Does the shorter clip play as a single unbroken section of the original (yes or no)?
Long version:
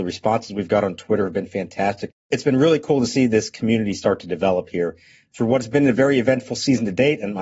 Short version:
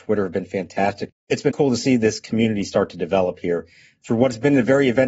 no